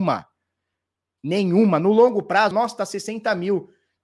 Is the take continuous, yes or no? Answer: no